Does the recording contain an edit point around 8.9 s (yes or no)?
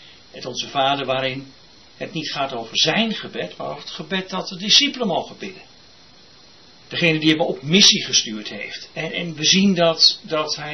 yes